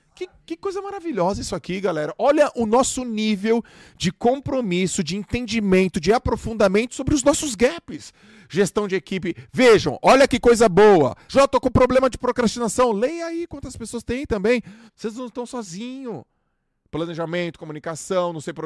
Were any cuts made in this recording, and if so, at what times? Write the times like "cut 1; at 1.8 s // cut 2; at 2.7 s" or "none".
cut 1; at 11.3 s // cut 2; at 14.9 s